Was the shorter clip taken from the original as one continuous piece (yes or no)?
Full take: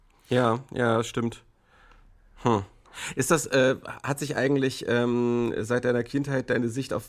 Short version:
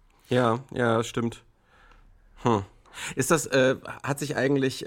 yes